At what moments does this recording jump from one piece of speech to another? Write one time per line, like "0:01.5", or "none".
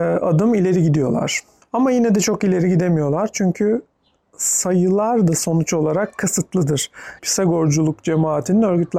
0:07.2